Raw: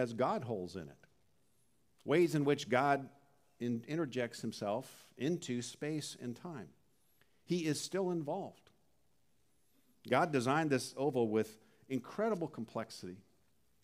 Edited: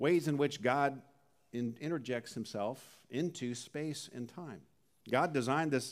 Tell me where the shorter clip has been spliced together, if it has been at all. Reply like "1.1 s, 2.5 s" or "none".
5.0 s